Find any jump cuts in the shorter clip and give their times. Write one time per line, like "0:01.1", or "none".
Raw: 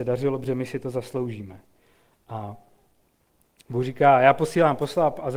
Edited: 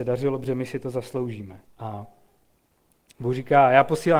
0:01.7